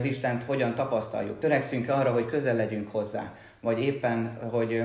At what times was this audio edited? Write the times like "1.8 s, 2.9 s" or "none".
none